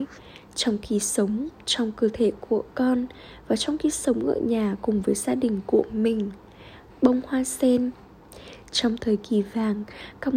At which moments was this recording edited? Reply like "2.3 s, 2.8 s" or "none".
6.9 s